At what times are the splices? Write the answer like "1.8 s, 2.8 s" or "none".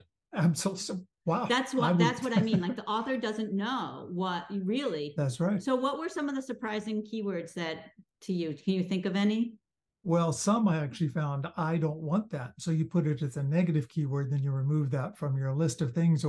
none

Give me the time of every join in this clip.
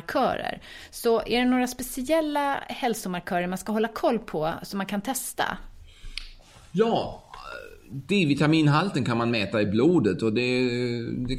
none

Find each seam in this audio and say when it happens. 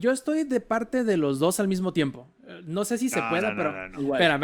none

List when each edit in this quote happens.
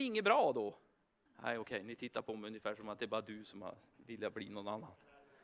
1.3 s

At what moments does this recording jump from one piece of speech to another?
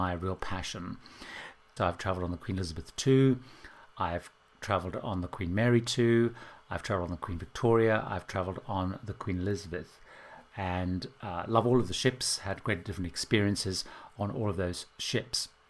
1.8 s

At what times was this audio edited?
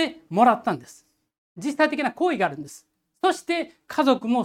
none

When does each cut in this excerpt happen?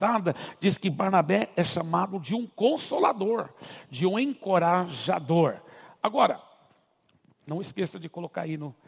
none

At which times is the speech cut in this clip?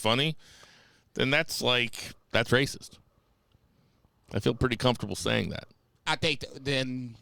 2.2 s

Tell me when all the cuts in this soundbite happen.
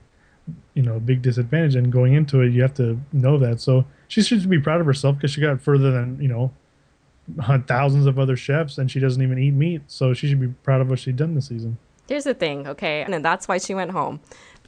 13.1 s

